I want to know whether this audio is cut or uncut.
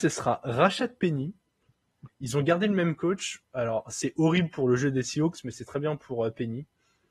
cut